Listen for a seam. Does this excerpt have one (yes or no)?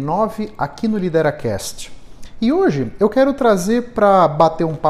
no